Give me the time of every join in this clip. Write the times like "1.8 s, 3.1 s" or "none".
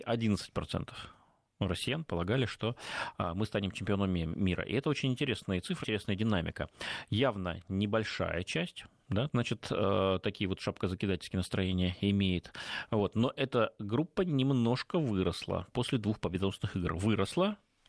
5.8 s, 9.3 s